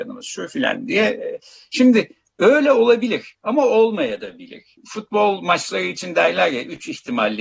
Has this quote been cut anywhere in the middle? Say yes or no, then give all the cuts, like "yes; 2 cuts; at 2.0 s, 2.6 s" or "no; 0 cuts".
no; 0 cuts